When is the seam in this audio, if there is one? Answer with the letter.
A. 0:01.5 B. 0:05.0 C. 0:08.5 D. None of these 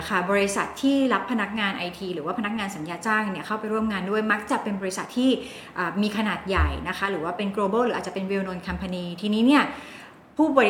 D